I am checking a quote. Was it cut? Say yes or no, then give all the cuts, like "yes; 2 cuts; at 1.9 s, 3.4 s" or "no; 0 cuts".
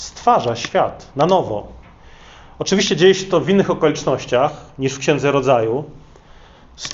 no; 0 cuts